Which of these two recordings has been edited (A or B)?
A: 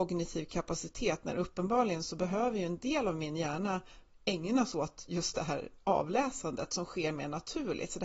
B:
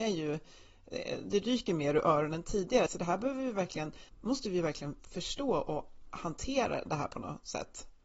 B